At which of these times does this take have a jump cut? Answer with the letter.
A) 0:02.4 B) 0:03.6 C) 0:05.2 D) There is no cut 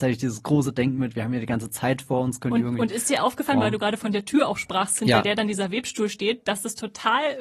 D